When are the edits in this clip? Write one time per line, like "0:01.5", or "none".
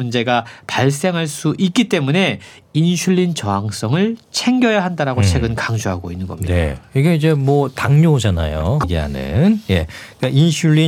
0:08.8